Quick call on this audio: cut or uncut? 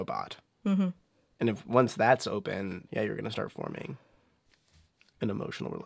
cut